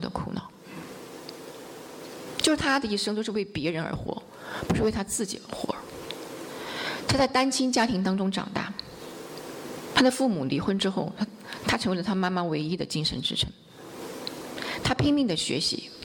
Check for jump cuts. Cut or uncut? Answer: uncut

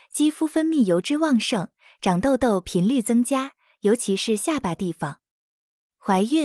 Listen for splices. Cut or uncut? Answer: uncut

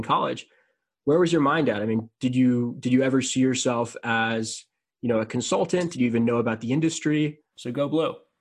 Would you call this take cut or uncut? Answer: cut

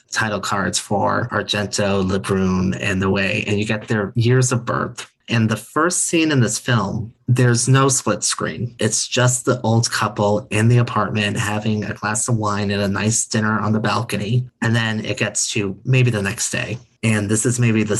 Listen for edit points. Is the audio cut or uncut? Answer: uncut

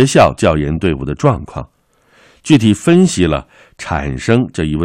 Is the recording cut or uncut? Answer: uncut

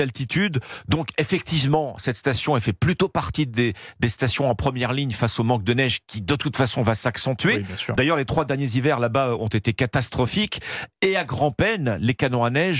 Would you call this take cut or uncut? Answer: uncut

